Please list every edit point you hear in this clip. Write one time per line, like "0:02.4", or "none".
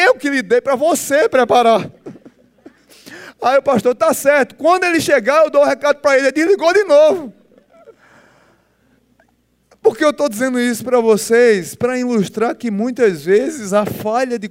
none